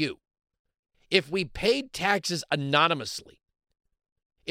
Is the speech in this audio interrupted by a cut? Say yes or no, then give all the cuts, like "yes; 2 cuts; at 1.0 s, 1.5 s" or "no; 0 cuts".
no; 0 cuts